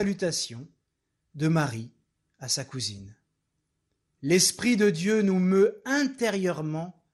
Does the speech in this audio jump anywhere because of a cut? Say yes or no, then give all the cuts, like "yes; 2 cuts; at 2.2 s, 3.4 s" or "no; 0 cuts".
yes; 1 cut; at 4.1 s